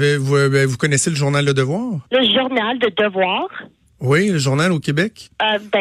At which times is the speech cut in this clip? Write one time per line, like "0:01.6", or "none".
0:02.1

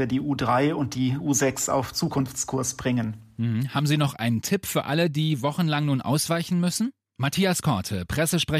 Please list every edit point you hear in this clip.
0:07.1

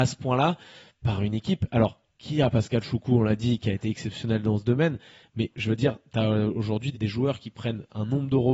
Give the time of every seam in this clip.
0:06.9

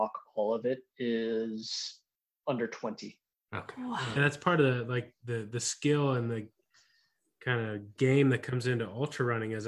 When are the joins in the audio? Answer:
0:04.2

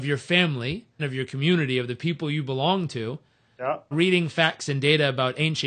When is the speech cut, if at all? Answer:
0:01.0
0:03.9

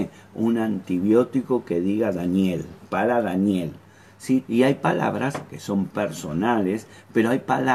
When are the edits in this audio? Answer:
0:04.4
0:05.5

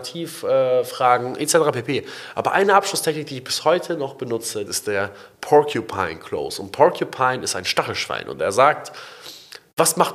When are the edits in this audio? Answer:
0:04.7

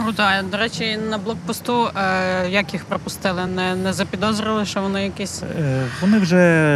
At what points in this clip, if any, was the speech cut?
none

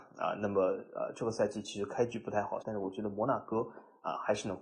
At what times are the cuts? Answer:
0:02.6

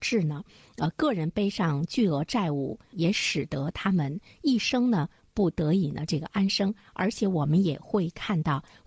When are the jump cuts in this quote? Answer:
none

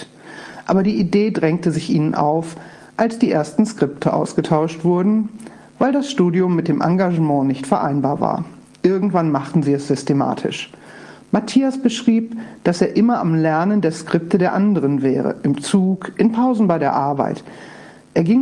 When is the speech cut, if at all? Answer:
none

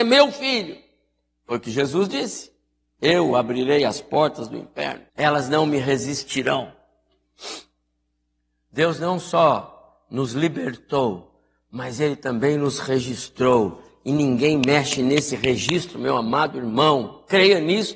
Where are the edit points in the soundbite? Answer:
0:05.1

